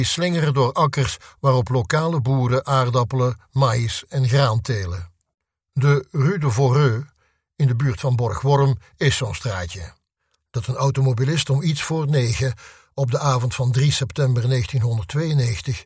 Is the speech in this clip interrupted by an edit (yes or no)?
no